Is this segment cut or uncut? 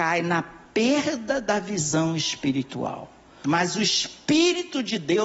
cut